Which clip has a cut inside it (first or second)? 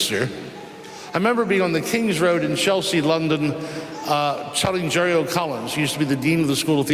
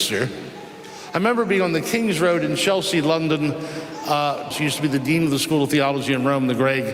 second